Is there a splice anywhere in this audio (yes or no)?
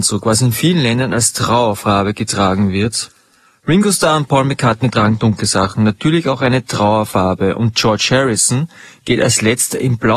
no